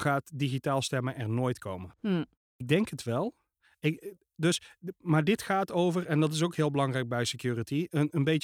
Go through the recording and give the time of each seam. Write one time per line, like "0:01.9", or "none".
0:02.3